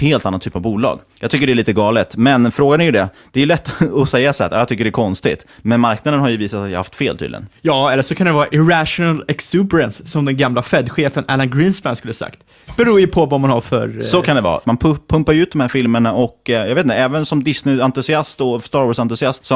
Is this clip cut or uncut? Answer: cut